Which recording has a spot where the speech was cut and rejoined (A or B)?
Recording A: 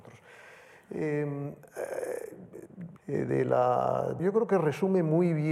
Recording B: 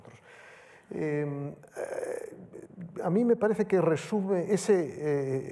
A